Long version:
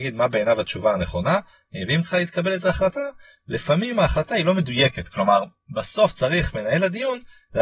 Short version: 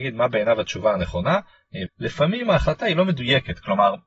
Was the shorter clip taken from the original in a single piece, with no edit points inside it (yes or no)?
no